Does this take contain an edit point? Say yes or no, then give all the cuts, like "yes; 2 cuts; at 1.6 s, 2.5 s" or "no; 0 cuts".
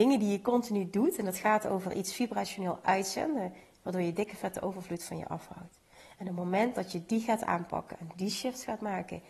no; 0 cuts